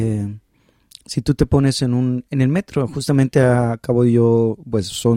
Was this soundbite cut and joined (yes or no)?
yes